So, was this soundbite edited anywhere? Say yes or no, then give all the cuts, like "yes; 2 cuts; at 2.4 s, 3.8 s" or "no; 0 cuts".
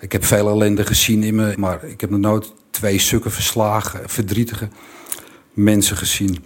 yes; 1 cut; at 1.5 s